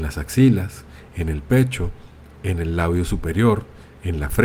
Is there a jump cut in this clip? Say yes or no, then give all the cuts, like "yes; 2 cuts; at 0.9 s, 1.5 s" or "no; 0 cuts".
no; 0 cuts